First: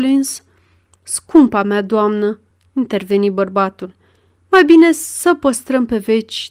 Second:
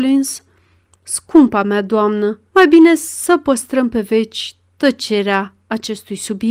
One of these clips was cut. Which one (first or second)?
second